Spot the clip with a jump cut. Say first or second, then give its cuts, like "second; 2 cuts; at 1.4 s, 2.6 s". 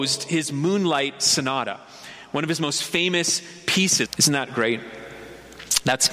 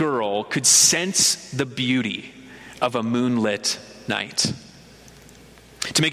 first; 1 cut; at 4.1 s